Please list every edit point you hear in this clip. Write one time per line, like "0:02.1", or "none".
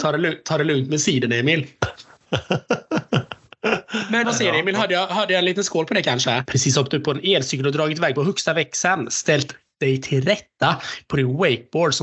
0:04.2
0:06.4